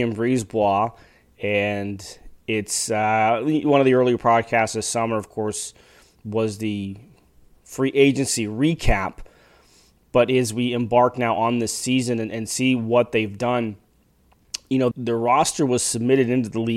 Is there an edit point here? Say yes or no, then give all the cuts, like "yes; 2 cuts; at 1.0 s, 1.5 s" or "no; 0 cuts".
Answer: yes; 1 cut; at 14.9 s